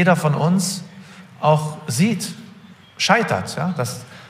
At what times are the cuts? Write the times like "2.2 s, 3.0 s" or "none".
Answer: 2.8 s